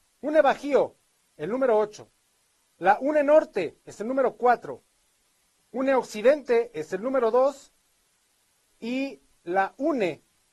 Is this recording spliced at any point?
yes; 1 cut; at 2.7 s

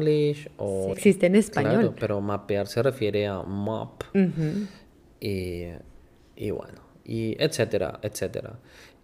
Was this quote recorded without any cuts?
no; 1 cut; at 0.9 s

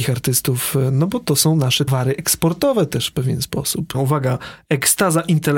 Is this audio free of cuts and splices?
no; 2 cuts; at 1.9 s, 3.9 s

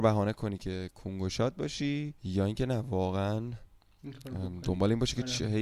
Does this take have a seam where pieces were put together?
yes; 1 cut; at 2.2 s

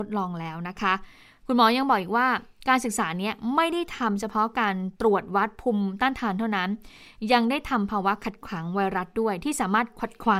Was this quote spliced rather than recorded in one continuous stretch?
no; 0 cuts

